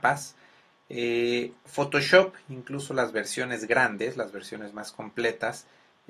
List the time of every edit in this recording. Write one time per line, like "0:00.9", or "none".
none